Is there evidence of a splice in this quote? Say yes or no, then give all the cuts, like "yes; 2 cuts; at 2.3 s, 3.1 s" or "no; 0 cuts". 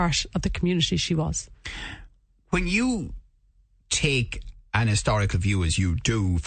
no; 0 cuts